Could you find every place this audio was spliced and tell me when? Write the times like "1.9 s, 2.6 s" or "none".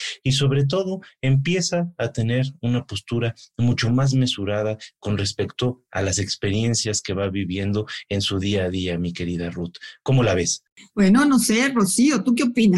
none